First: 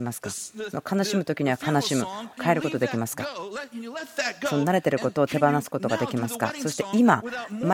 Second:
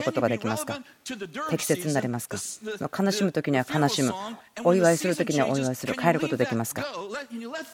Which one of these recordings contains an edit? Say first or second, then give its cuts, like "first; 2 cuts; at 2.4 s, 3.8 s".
first; 1 cut; at 2.4 s